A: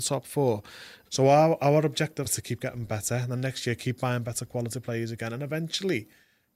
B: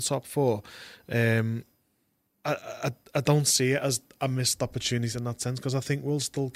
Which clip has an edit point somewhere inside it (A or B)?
A